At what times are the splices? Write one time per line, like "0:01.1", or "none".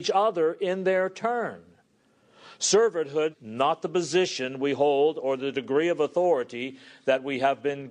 0:03.3